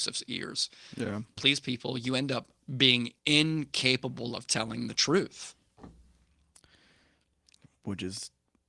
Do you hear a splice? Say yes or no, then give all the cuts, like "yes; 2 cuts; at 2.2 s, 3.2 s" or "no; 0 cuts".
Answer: yes; 2 cuts; at 1.4 s, 3.2 s